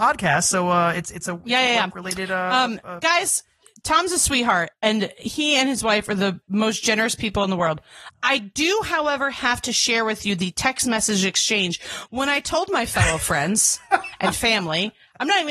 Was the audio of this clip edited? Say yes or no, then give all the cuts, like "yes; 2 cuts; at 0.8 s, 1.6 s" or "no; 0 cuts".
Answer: no; 0 cuts